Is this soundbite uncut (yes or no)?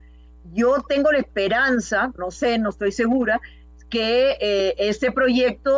no